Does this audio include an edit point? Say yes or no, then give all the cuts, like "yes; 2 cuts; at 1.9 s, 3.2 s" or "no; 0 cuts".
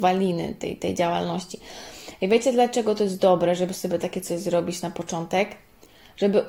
no; 0 cuts